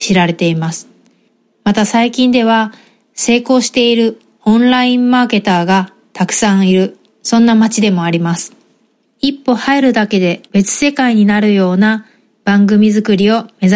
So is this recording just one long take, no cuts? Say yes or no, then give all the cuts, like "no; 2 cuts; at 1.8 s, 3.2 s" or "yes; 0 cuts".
no; 2 cuts; at 9.0 s, 10.5 s